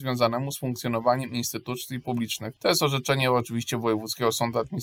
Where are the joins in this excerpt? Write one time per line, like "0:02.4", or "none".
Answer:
0:02.6